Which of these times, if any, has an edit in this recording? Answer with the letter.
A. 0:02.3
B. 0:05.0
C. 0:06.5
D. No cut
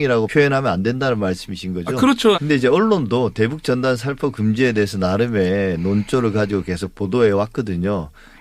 A